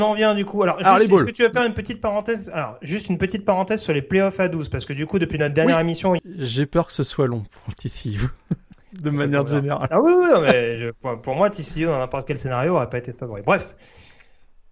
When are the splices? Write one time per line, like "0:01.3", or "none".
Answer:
0:06.2